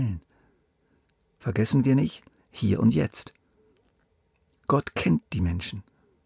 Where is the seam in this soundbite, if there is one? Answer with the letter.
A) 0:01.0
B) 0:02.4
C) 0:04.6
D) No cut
B